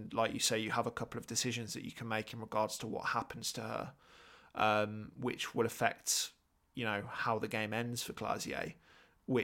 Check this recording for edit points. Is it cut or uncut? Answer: uncut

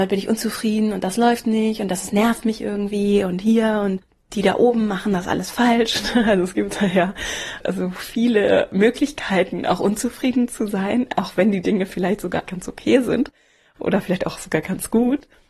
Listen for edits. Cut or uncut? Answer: cut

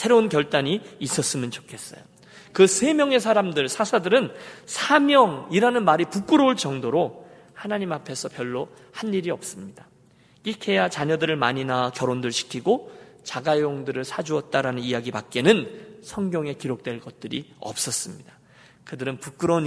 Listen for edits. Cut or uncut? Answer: cut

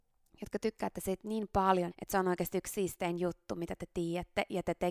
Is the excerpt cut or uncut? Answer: cut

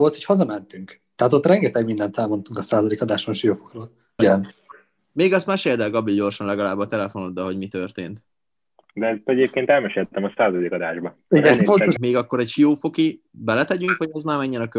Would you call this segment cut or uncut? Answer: cut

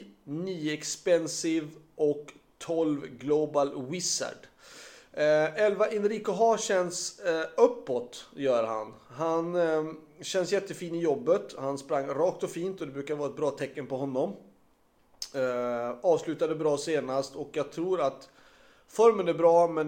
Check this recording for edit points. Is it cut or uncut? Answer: uncut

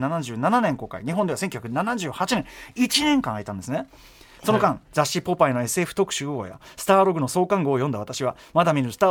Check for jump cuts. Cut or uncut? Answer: uncut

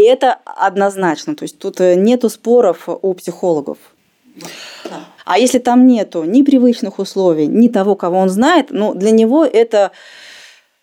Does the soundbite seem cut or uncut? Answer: cut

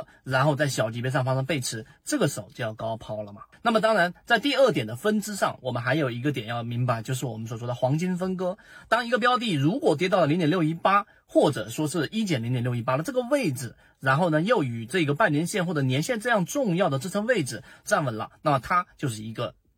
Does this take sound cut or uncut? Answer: cut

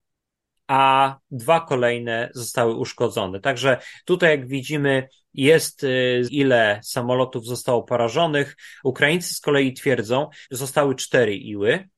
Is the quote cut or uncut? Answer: cut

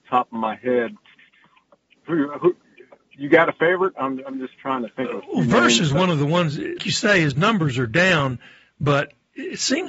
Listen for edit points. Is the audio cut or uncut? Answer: cut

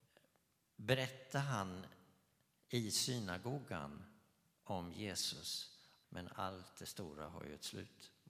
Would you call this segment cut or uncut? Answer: cut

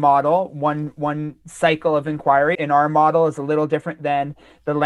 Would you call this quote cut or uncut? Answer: cut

